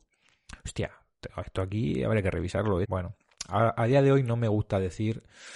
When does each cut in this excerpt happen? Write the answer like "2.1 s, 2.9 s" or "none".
2.8 s